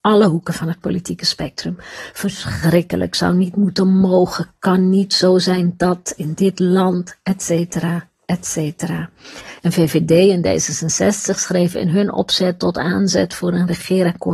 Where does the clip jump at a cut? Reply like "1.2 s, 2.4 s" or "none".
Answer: 9.6 s